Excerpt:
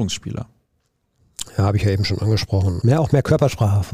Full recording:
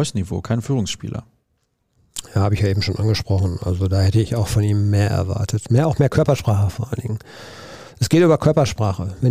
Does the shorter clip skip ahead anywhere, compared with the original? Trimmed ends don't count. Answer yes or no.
yes